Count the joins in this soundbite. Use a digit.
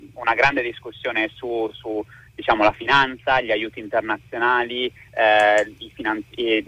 0